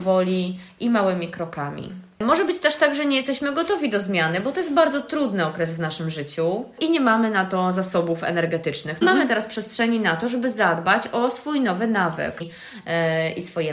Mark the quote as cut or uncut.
cut